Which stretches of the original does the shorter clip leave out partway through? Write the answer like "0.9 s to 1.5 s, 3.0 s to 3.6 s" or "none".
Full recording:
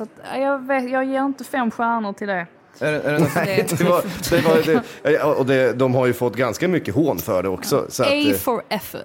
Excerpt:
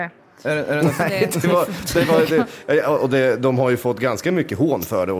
none

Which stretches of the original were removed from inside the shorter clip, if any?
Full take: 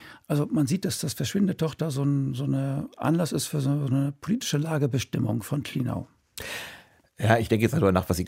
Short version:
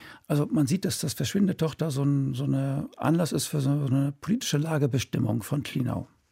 none

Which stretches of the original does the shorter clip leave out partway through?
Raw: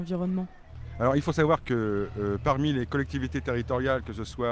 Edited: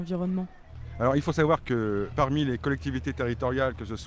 2.1 s to 2.4 s

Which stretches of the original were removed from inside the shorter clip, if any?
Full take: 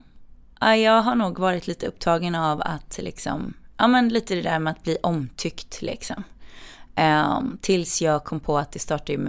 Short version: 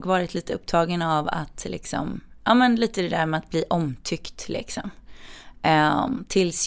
none

